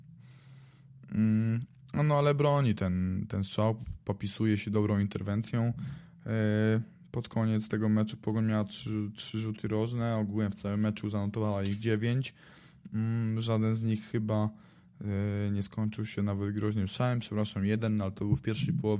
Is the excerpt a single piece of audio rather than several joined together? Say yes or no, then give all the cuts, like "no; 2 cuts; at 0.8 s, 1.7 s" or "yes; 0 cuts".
yes; 0 cuts